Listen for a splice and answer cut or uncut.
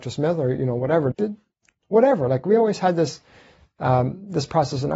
cut